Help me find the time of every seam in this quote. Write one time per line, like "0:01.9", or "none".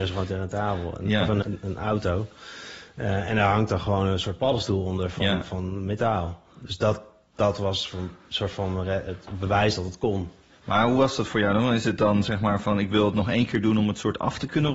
0:01.4